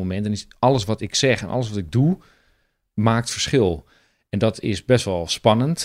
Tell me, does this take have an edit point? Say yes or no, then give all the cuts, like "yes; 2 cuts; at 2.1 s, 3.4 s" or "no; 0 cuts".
no; 0 cuts